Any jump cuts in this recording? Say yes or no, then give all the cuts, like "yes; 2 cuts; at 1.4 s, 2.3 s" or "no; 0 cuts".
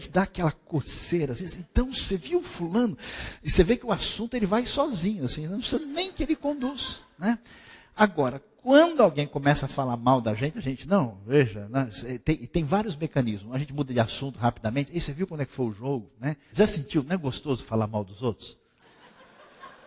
yes; 2 cuts; at 16.5 s, 18.8 s